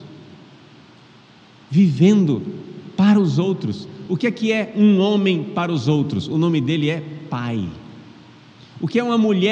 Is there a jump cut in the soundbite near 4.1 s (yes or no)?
no